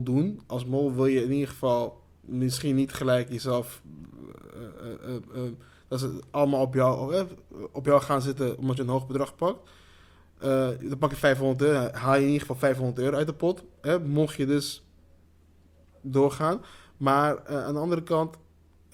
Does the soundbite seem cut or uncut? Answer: uncut